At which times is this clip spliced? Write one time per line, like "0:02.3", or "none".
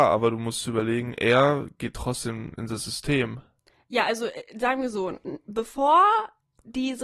none